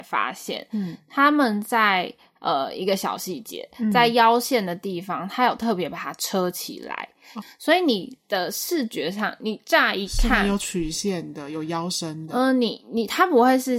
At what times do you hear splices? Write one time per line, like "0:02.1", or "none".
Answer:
0:07.4